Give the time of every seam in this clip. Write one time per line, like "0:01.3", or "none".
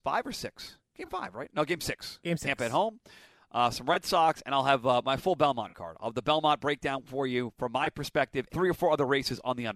0:08.5